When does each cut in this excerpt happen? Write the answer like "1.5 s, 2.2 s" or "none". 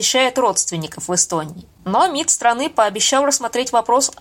1.8 s